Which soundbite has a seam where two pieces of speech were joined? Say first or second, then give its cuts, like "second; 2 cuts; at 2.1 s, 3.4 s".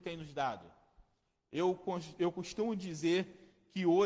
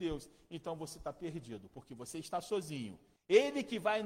second; 1 cut; at 3.2 s